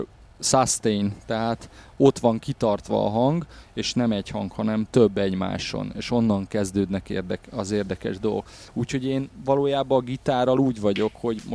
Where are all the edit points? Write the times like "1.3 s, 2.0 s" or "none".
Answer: 8.7 s